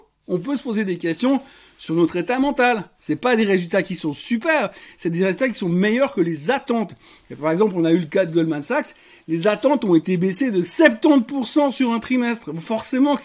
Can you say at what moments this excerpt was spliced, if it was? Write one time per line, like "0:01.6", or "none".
none